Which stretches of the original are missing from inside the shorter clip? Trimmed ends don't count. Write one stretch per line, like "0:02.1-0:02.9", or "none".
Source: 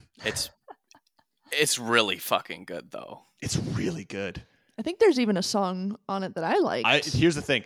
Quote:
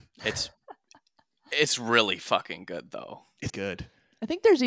0:03.5-0:04.1